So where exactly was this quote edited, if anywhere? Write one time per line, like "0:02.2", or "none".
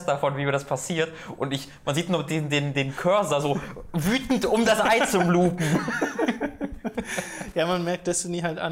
none